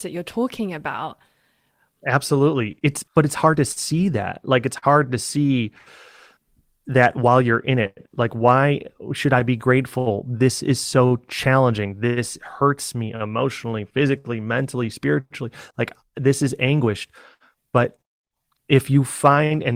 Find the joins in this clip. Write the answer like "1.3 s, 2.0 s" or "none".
none